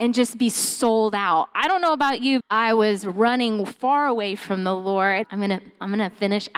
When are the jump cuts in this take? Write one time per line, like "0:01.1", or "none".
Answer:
0:02.4
0:05.2